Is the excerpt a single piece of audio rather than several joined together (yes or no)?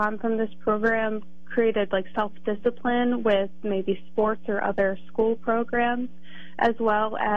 yes